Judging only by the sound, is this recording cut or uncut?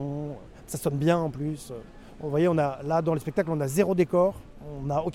uncut